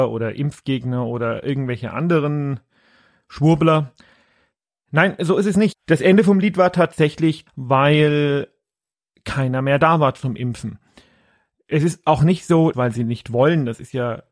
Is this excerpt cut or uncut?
cut